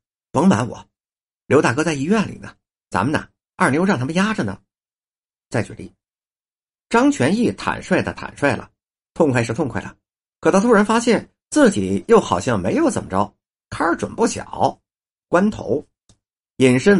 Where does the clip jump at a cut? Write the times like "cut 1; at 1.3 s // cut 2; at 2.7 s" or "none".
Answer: cut 1; at 13.6 s // cut 2; at 15.2 s